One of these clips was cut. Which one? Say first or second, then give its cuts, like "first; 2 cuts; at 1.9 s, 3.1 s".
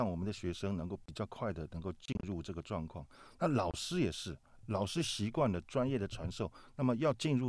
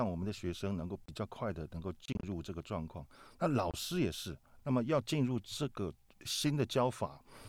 second; 1 cut; at 4.6 s